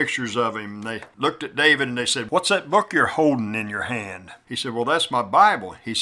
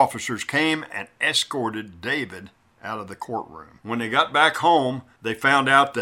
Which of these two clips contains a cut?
second; 1 cut; at 3.8 s

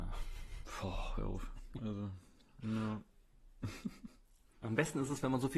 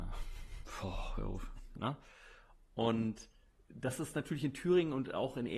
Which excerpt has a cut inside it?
second; 1 cut; at 1.7 s

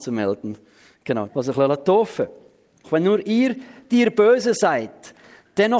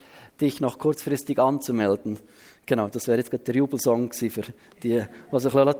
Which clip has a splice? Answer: first; 2 cuts; at 1.3 s, 2.8 s

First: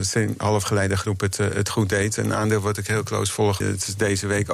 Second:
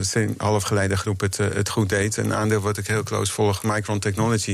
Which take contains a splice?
first; 1 cut; at 3.6 s

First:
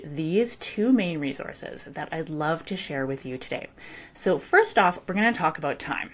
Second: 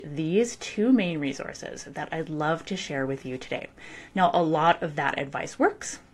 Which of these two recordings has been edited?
second; 1 cut; at 4.1 s

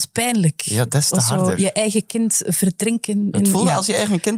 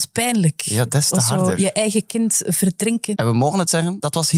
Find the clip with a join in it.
second; 1 cut; at 3.1 s

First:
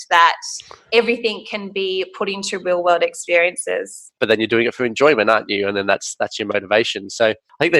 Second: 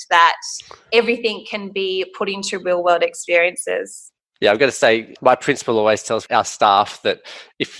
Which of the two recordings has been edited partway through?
first; 1 cut; at 4.2 s

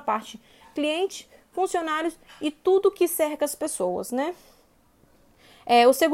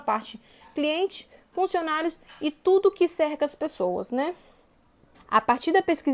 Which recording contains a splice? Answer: second; 1 cut; at 5.1 s

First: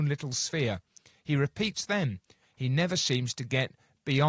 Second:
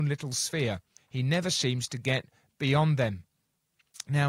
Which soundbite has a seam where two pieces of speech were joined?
second; 1 cut; at 1.0 s

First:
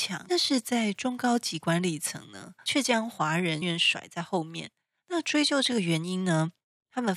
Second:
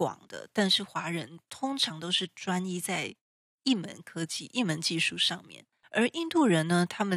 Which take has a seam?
first; 1 cut; at 3.6 s

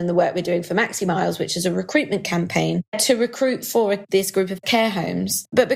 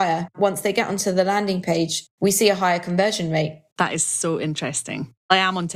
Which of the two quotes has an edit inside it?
second; 1 cut; at 3.7 s

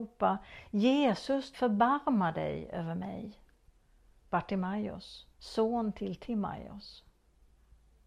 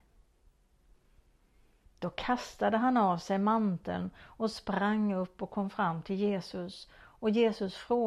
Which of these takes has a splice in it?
first; 3 cuts; at 1.5 s, 4.2 s, 5.3 s

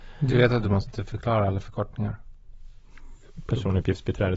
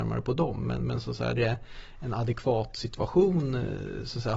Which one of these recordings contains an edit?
second; 1 cut; at 1.4 s

